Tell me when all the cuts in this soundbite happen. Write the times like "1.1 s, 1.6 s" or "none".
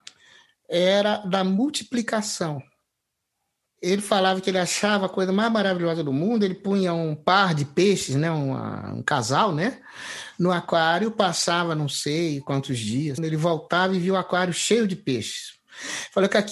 13.2 s